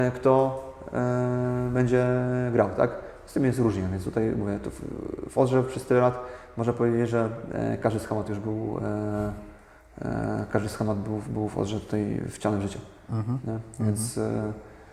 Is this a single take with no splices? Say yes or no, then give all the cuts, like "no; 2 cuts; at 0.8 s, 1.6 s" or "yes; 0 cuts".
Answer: yes; 0 cuts